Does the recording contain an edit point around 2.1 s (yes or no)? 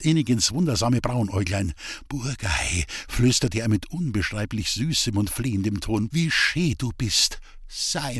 no